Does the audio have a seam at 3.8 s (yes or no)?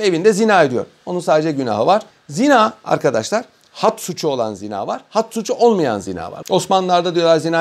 no